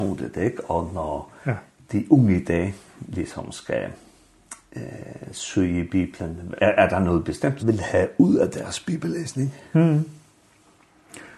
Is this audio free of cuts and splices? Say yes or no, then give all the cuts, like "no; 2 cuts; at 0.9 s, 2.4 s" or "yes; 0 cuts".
no; 2 cuts; at 6.6 s, 7.6 s